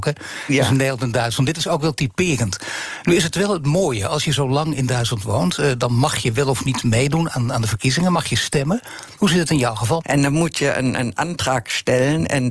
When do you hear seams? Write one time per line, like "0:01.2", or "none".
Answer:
0:10.0